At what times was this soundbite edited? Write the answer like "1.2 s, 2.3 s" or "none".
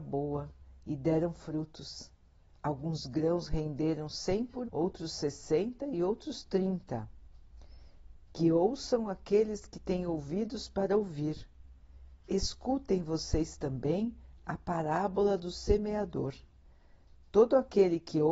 4.6 s

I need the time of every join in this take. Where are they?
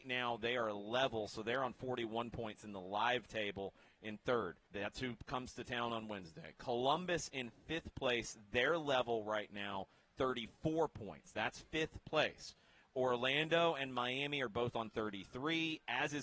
4.7 s

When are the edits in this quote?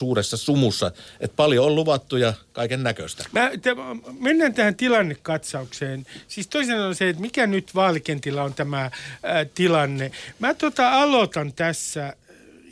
none

